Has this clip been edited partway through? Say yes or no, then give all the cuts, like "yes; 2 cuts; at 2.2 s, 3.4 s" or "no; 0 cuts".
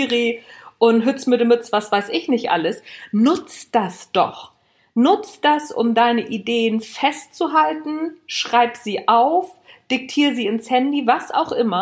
no; 0 cuts